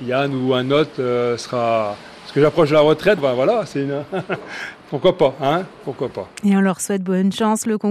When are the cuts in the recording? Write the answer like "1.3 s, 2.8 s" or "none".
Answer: 3.2 s